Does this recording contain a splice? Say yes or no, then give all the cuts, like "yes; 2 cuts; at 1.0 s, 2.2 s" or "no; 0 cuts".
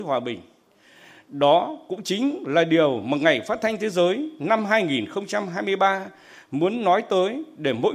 no; 0 cuts